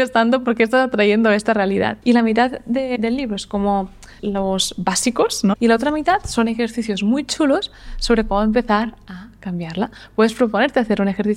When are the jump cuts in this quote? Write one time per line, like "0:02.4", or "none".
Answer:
0:04.2
0:05.6